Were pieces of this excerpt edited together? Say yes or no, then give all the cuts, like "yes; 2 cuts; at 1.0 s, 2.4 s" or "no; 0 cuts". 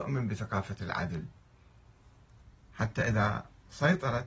no; 0 cuts